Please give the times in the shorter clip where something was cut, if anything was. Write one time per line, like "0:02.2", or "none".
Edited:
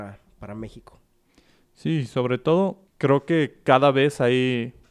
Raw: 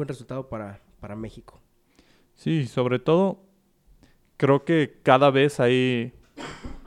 0:02.9